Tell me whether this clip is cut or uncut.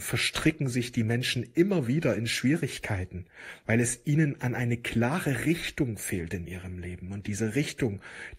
uncut